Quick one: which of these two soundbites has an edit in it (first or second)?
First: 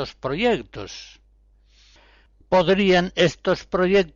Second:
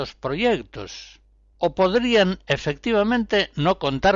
second